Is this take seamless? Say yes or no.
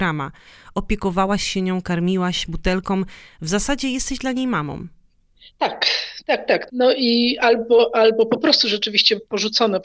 no